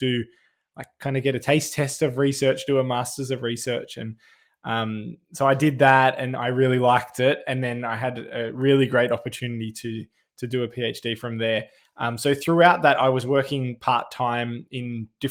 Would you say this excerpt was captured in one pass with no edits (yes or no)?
yes